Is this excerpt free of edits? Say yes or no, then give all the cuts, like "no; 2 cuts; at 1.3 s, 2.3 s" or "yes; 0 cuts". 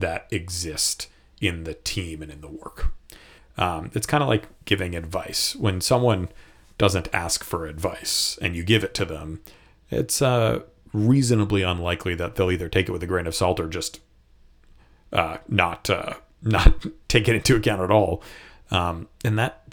no; 2 cuts; at 3.4 s, 18.5 s